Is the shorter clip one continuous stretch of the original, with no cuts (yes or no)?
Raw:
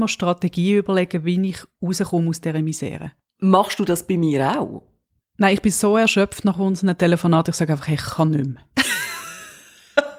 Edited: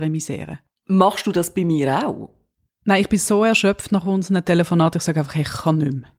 yes